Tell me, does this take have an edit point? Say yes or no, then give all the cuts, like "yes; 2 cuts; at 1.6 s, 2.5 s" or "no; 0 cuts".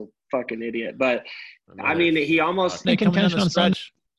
yes; 1 cut; at 2.8 s